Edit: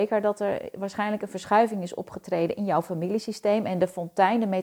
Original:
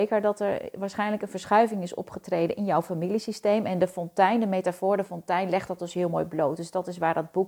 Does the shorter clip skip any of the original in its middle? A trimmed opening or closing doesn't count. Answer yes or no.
no